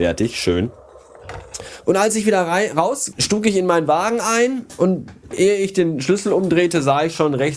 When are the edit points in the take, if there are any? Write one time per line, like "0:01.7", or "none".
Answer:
0:01.8
0:03.1